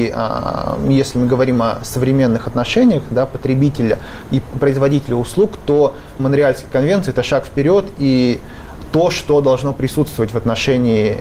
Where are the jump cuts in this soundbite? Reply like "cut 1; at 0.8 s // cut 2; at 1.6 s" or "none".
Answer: cut 1; at 6.2 s